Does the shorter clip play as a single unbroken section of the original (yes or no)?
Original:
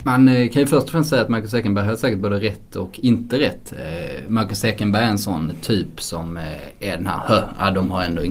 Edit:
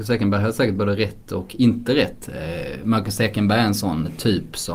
yes